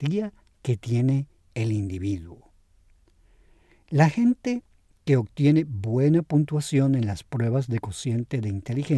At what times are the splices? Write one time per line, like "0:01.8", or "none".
none